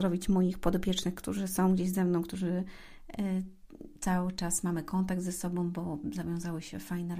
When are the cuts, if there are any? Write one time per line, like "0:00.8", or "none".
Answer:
none